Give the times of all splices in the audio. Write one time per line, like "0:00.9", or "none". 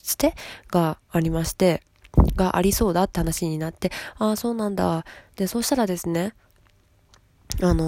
0:05.2